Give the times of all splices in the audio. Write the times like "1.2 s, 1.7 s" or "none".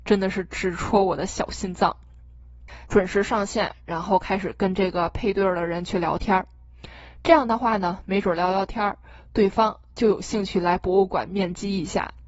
2.9 s